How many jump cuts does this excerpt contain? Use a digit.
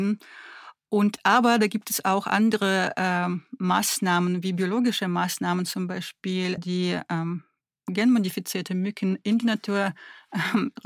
1